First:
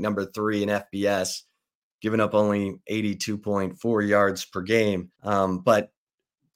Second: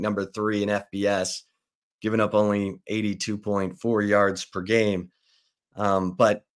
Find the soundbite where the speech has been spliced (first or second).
first